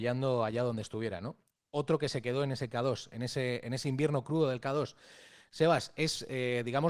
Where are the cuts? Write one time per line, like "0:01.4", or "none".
none